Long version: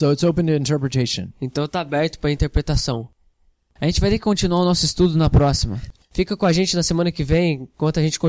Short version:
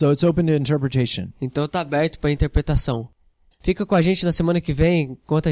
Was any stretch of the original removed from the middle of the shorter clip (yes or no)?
yes